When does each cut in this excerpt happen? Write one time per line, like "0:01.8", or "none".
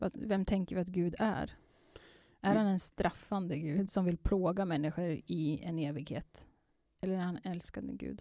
0:03.9